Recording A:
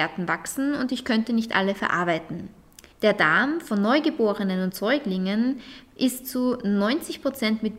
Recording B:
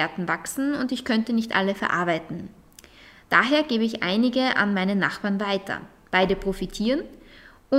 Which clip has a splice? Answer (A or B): A